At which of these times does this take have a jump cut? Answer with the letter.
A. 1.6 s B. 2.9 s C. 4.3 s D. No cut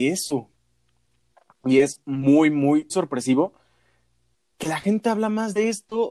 B